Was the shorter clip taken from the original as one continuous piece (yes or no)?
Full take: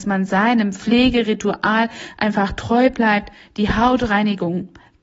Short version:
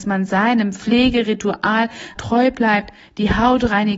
no